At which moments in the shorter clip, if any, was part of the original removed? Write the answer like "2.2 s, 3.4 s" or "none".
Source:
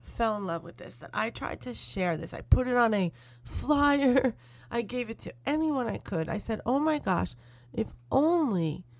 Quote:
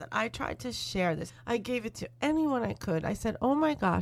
1.3 s